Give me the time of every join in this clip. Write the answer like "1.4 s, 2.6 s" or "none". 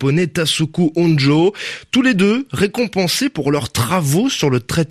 none